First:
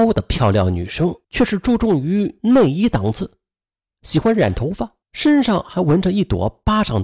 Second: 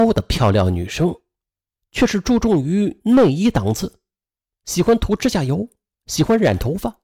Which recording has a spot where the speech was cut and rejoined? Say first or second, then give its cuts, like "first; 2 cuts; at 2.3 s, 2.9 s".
first; 3 cuts; at 1.2 s, 3.9 s, 5.0 s